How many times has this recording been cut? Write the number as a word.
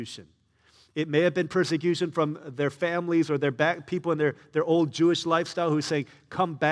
zero